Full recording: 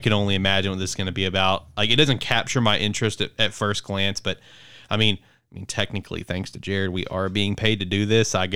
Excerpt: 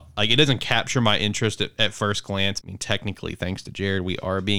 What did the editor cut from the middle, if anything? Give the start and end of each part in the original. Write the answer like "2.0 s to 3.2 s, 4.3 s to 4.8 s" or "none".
4.2 s to 5.5 s

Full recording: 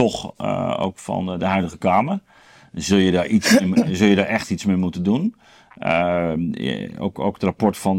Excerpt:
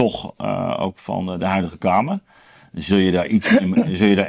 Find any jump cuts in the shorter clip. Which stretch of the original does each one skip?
none

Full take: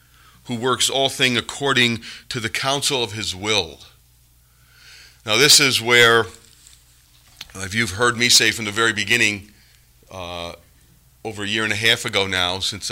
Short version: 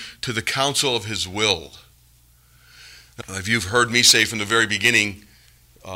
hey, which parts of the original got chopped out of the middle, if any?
5.3 s to 7.5 s

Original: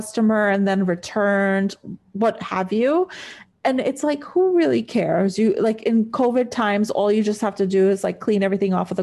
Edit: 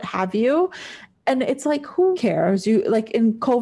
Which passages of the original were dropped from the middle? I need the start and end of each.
4.5 s to 4.8 s

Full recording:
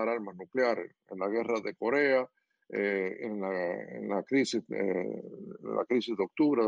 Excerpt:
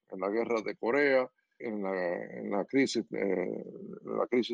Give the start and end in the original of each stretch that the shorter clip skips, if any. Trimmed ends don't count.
2.6 s to 3.2 s

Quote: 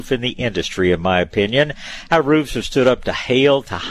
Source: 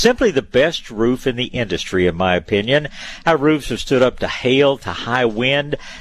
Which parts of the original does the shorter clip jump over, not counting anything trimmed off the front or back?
none

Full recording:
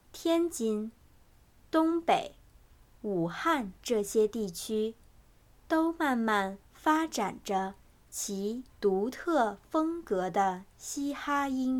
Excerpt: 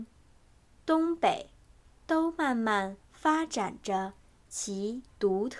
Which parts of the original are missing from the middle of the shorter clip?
2.8 s to 5.5 s

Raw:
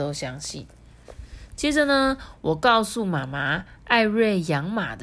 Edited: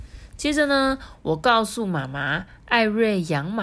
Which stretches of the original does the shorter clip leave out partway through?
none

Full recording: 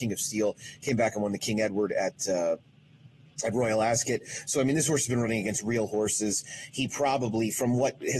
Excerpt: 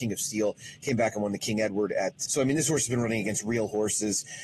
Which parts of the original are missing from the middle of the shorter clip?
2.3 s to 4.5 s

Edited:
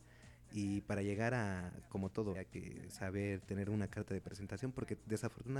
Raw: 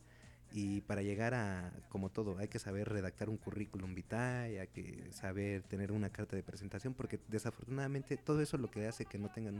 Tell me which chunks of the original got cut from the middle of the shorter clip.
2.4 s to 4.6 s

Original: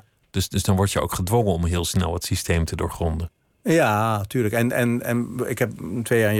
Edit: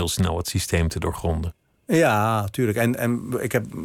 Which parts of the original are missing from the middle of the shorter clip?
4.7 s to 5.0 s

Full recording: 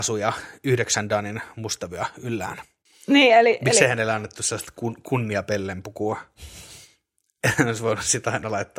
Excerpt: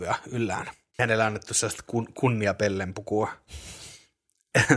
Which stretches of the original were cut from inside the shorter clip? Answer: 2.9 s to 3.9 s

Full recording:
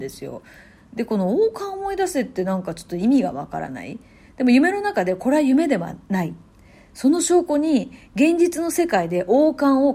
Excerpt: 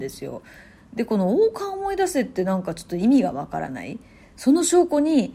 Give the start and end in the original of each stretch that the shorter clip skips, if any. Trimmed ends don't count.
4.2 s to 6.8 s

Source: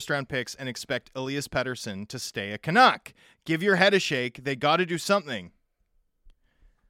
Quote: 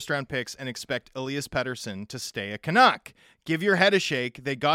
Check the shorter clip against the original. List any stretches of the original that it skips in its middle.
none

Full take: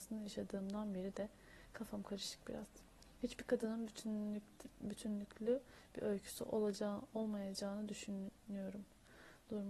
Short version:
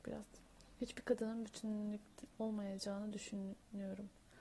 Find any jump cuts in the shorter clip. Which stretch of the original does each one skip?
4.7 s to 7.1 s

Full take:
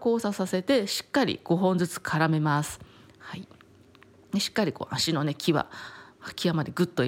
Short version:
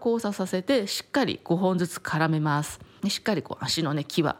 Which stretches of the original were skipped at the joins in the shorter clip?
3.0 s to 4.3 s

